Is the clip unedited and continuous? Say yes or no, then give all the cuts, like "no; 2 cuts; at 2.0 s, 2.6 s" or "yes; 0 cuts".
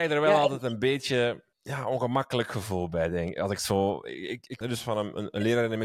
no; 2 cuts; at 1.5 s, 4.6 s